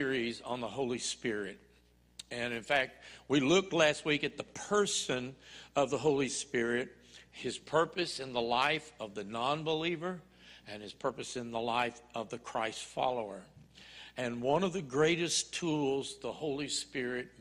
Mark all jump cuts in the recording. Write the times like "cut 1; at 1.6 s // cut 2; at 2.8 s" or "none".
none